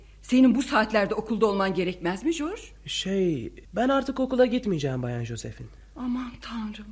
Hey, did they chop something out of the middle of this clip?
yes; 1 cut; at 3.6 s

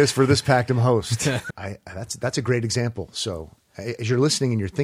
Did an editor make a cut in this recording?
yes; 1 cut; at 1.5 s

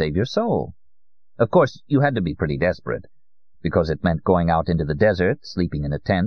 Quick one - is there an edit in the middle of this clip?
no; 0 cuts

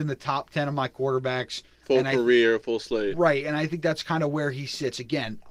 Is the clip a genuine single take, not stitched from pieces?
yes; 0 cuts

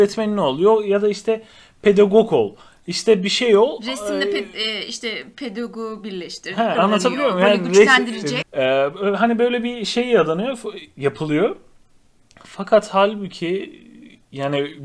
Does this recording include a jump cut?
yes; 2 cuts; at 6.8 s, 8.4 s

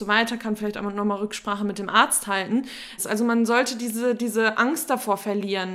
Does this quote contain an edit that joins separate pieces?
yes; 1 cut; at 3.0 s

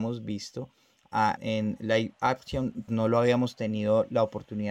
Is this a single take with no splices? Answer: no; 2 cuts; at 1.4 s, 2.9 s

